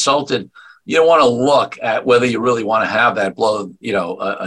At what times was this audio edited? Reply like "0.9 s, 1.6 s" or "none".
none